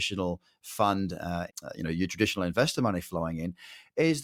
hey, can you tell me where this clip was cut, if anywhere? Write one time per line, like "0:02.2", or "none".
0:01.5